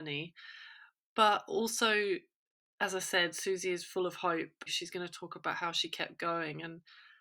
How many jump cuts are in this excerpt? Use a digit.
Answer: 1